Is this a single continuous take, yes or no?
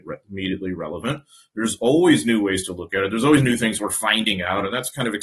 yes